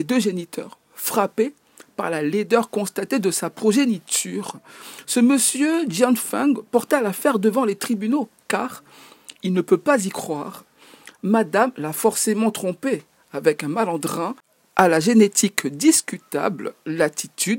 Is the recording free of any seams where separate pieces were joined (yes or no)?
yes